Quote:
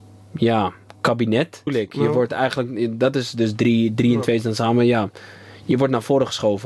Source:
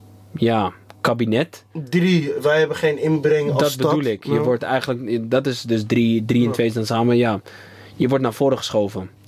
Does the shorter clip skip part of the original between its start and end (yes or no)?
yes